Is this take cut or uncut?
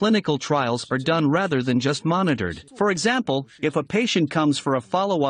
cut